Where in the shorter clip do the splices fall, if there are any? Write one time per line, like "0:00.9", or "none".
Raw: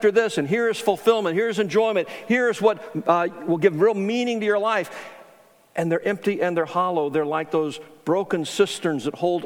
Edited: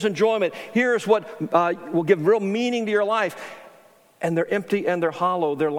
none